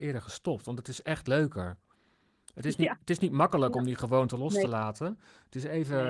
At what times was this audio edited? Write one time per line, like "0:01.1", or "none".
none